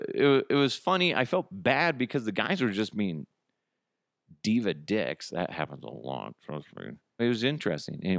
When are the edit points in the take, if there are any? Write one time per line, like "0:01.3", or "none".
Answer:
0:07.2